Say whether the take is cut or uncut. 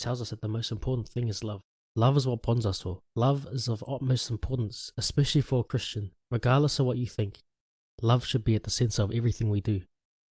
cut